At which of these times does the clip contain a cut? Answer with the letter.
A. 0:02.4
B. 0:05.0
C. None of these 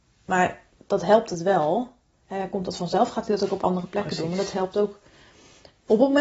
C